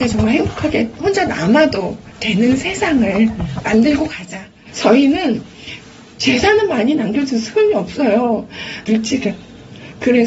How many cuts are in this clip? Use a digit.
1